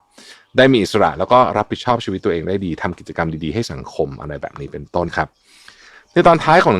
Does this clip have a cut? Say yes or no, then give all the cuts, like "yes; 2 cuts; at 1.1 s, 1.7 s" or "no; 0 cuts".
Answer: yes; 1 cut; at 5.1 s